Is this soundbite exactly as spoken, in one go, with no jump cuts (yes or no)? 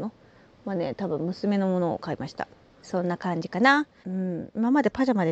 no